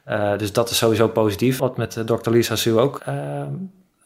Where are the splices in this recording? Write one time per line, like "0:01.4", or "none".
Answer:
0:01.6
0:03.0